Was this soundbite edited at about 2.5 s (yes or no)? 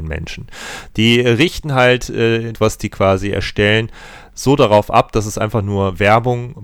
yes